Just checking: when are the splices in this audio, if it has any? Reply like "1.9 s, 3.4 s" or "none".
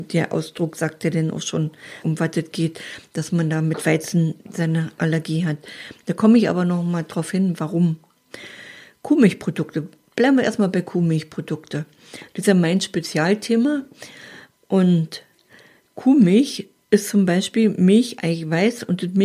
2.0 s